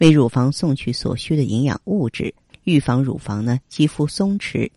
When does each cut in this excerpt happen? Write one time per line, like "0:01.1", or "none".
0:02.5